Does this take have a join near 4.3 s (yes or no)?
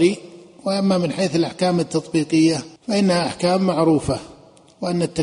no